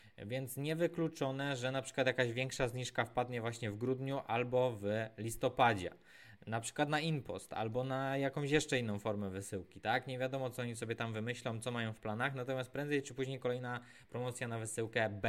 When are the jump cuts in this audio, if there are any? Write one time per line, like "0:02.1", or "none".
none